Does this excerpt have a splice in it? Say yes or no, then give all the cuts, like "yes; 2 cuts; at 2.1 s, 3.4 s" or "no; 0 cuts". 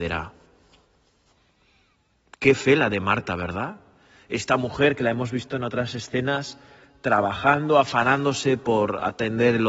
no; 0 cuts